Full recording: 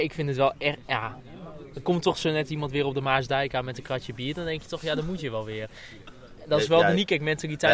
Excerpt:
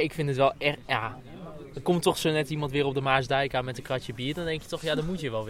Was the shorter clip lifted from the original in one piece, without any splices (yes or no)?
yes